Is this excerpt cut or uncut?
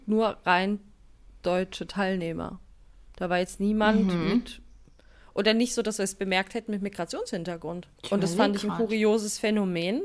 cut